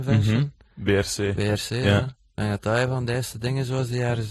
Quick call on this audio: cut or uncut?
uncut